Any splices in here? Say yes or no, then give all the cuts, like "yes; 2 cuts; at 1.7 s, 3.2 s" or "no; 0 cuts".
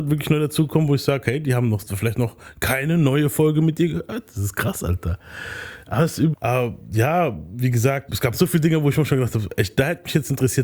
yes; 2 cuts; at 6.3 s, 8.1 s